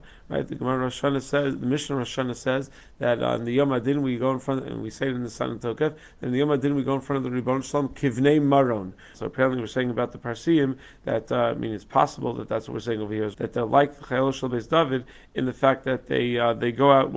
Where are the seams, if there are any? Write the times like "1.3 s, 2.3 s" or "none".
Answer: 9.1 s, 13.3 s